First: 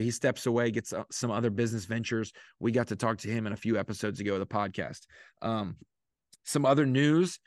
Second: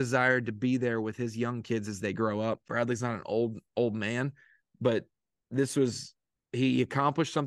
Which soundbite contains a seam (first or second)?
second